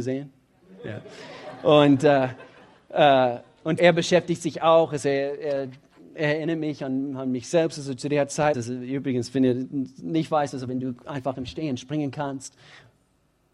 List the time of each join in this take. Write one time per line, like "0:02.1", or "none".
0:03.8
0:08.5
0:10.7